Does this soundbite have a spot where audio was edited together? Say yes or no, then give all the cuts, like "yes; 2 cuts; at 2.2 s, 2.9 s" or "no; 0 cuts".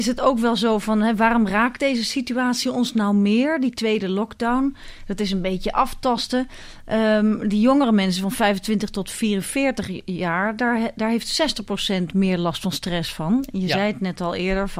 no; 0 cuts